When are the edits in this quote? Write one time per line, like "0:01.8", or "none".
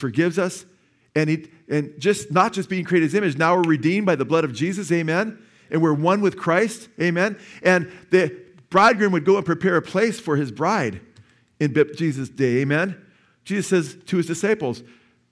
none